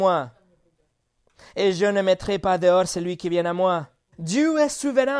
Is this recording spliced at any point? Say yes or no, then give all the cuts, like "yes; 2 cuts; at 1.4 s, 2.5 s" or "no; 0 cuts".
yes; 1 cut; at 4.1 s